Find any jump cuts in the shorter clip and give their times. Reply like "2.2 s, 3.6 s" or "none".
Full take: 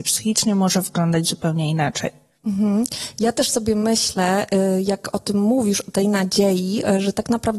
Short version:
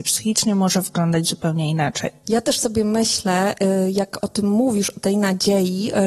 2.2 s